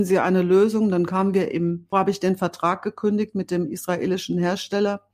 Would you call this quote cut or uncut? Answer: cut